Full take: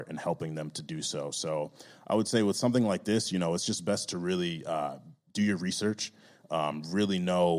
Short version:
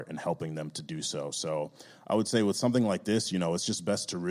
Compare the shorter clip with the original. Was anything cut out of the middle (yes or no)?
no